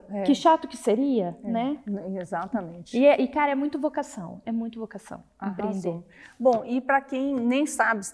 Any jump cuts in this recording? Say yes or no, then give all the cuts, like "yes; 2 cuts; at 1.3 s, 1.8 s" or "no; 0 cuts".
no; 0 cuts